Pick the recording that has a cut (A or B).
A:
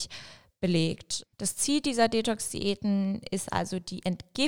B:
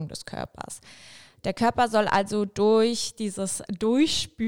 A